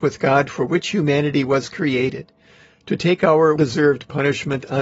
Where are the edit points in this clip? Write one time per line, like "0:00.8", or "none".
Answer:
0:03.6